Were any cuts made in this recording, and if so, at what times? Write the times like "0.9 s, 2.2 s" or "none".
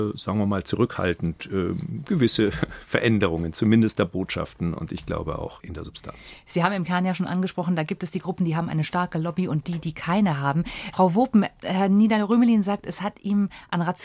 none